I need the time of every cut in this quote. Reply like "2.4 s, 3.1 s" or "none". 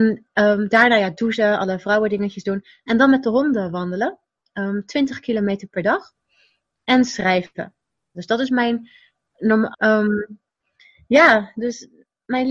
8.1 s, 9.7 s